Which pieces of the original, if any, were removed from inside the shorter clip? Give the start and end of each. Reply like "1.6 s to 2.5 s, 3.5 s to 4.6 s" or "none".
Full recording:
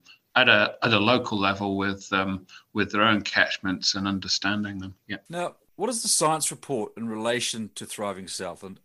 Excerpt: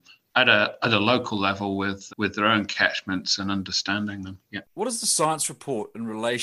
2.1 s to 2.7 s, 5.2 s to 5.6 s